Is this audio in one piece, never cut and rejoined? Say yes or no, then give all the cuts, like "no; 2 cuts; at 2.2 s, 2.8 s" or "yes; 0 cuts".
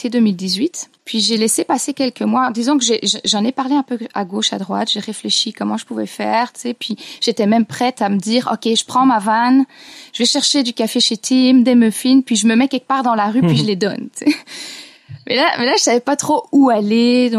no; 1 cut; at 1.0 s